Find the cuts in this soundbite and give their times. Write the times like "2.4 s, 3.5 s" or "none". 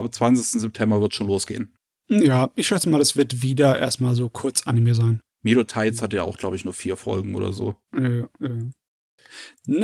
5.2 s, 7.8 s